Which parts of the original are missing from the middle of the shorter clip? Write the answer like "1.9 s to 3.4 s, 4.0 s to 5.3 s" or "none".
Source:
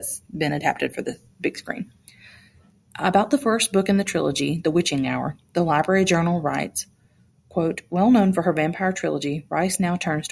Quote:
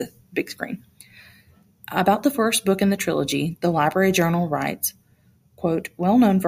4.6 s to 5.5 s

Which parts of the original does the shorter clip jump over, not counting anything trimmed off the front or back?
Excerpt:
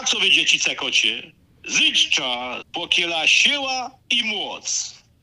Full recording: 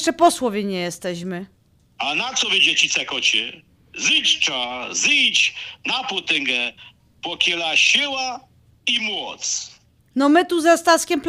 4.9 s to 7.1 s, 8.5 s to 8.8 s

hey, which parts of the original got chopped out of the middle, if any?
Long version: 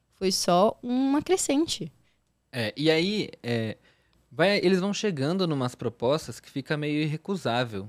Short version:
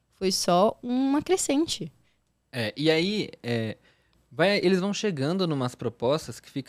none

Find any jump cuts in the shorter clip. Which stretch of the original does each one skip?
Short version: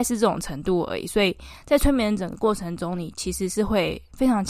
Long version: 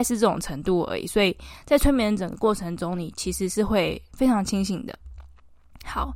none

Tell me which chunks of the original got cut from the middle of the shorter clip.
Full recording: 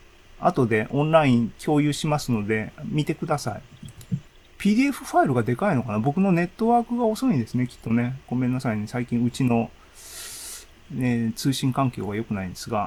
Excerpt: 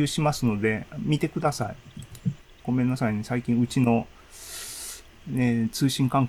4.4 s to 8.2 s

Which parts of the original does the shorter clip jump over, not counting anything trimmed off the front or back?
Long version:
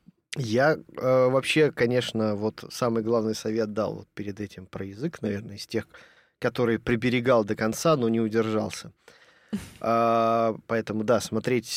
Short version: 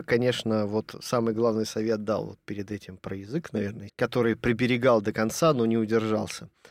5.6 s to 6.3 s

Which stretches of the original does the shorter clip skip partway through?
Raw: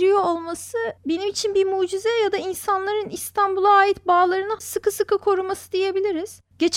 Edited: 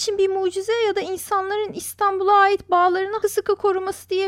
4.6 s to 4.8 s

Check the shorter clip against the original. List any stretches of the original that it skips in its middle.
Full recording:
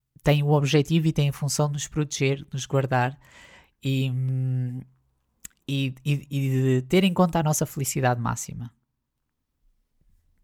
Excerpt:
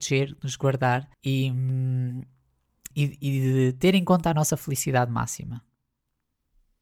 3.2 s to 3.7 s, 5.5 s to 6.0 s

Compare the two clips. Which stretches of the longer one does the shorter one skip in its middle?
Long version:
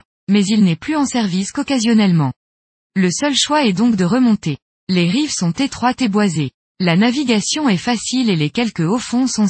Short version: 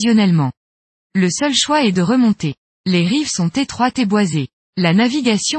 3.7 s to 4.0 s

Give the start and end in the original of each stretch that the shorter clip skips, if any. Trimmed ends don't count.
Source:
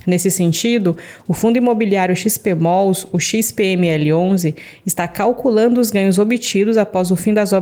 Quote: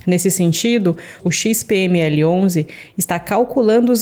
1.2 s to 3.1 s

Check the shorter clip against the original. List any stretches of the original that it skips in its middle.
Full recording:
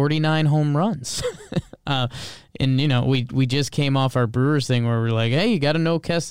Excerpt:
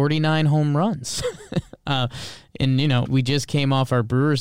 3.0 s to 3.3 s

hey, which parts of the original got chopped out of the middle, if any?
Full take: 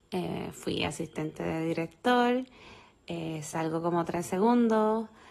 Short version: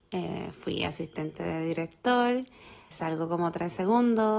2.9 s to 3.4 s

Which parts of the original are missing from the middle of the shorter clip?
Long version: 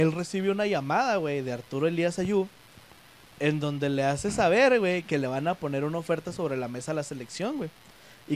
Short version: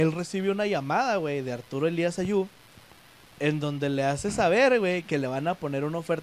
none

